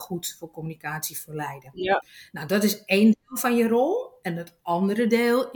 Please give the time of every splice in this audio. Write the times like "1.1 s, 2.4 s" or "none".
none